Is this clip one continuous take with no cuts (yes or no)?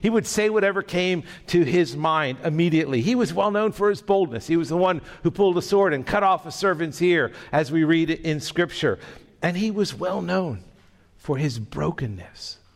yes